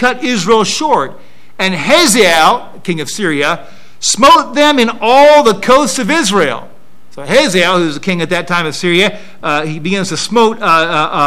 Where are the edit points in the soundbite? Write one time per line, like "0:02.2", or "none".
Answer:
none